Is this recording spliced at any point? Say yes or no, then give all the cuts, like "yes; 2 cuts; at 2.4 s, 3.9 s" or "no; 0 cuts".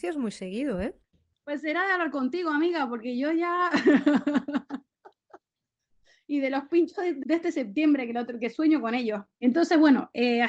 yes; 2 cuts; at 7.2 s, 9.3 s